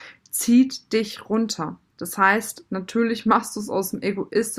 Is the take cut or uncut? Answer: cut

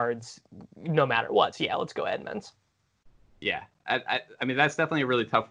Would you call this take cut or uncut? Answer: uncut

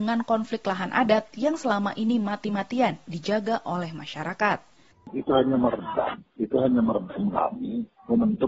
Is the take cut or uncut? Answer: uncut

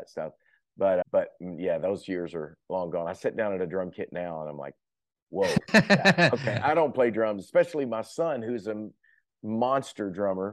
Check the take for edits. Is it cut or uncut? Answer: cut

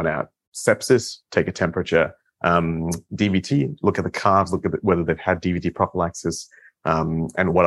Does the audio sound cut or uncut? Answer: uncut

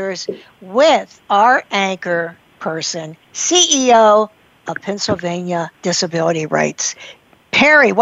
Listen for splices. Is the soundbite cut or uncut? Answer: cut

